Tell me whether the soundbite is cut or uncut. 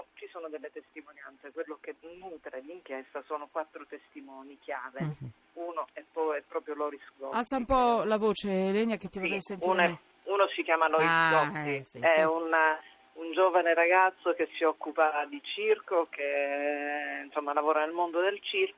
uncut